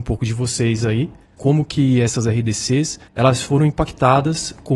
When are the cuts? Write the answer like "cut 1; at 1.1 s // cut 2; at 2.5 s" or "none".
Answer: cut 1; at 1.4 s // cut 2; at 3.1 s